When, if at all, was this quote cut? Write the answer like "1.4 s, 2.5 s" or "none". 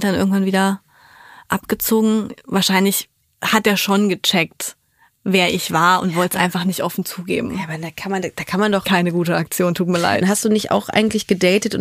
8.8 s, 10.2 s